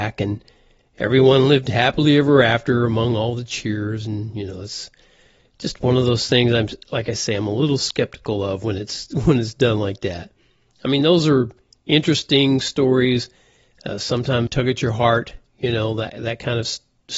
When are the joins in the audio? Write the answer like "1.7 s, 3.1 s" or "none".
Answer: 14.5 s